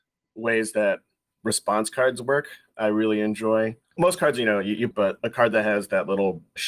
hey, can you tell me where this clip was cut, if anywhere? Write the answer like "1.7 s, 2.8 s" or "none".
4.9 s